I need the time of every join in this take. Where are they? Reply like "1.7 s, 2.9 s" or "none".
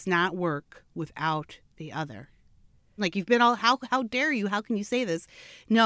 3.0 s